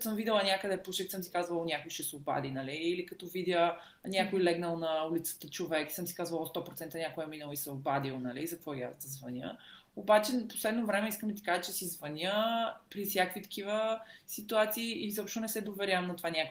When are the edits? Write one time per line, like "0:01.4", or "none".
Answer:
none

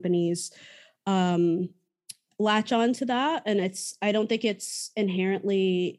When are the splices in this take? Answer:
none

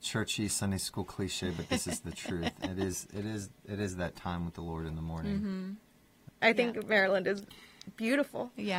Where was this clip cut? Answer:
0:06.3

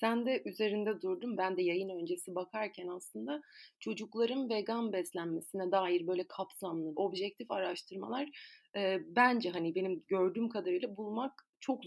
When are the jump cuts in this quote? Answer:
0:01.4
0:06.9

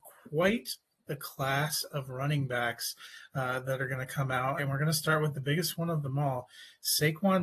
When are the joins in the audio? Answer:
0:04.6

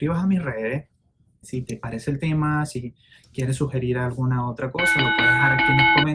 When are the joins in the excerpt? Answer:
0:01.4

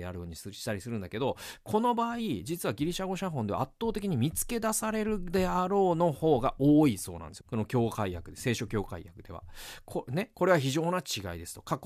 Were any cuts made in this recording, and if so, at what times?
0:07.4

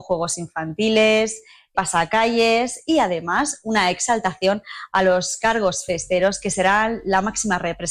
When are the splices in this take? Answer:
0:01.7

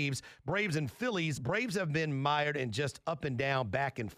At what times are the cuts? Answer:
none

